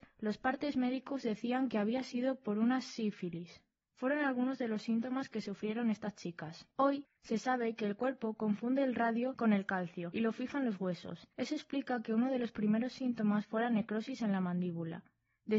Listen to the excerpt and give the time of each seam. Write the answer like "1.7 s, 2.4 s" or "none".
3.8 s